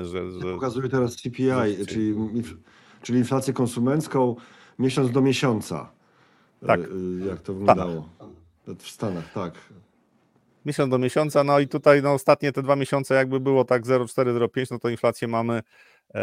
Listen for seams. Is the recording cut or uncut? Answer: uncut